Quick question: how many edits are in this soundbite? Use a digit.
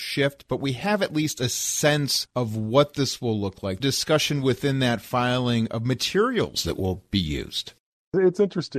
1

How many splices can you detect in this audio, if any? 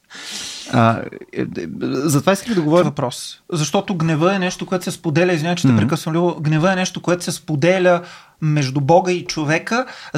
1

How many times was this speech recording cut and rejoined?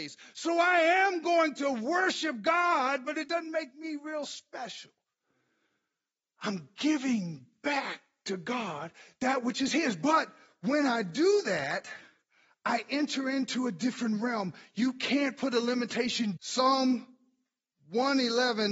1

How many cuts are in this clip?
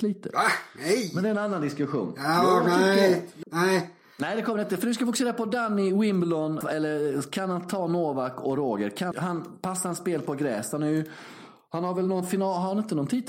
3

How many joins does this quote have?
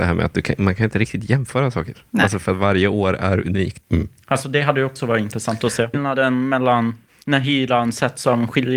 2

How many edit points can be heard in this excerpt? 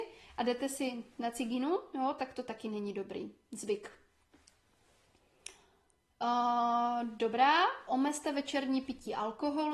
2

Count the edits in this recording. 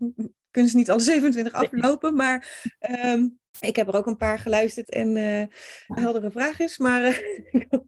3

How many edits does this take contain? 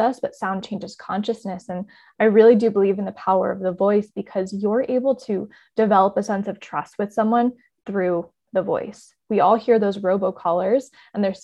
0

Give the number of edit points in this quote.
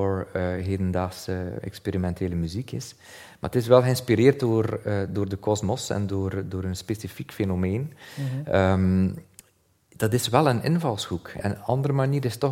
1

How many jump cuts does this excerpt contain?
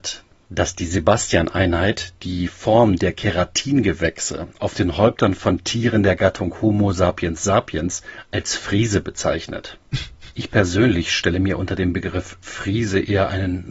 0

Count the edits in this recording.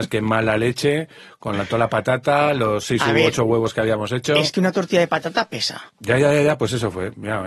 1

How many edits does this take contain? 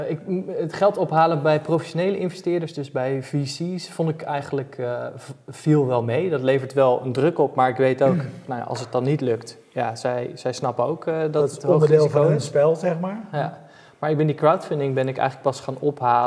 0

